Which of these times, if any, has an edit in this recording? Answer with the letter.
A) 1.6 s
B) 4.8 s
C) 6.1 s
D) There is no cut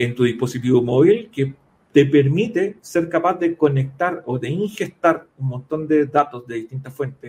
D